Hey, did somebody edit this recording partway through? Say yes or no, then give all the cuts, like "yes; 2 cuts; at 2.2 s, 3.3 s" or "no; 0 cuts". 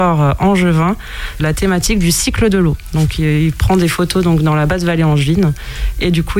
yes; 1 cut; at 1.4 s